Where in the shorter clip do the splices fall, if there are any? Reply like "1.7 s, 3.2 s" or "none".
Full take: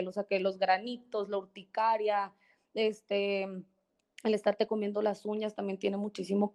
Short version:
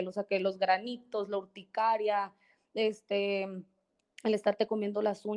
none